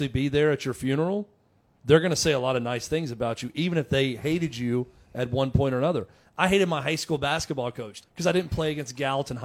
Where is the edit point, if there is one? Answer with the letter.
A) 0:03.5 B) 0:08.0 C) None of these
B